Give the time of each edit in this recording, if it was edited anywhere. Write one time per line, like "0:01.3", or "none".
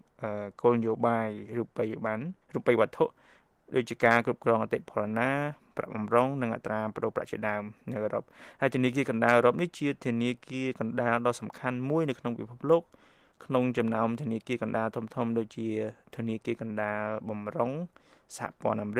0:02.4